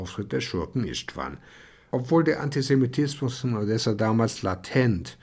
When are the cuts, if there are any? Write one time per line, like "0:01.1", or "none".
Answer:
0:01.9